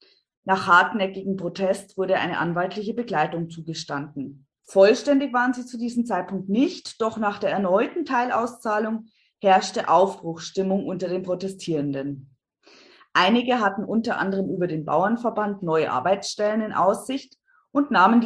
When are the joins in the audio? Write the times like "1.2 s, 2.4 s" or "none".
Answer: 4.6 s